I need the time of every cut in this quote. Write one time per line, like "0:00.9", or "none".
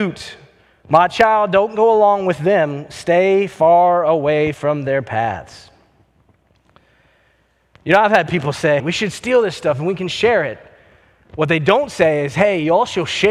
0:08.8